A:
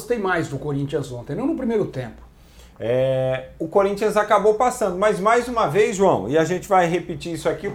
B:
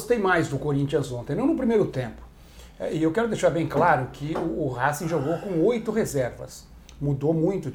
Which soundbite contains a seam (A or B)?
A